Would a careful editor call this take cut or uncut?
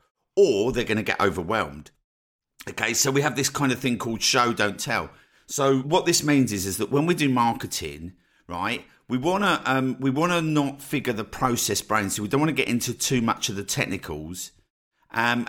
cut